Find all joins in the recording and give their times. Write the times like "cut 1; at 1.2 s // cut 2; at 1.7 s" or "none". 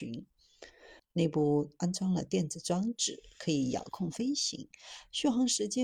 cut 1; at 1.0 s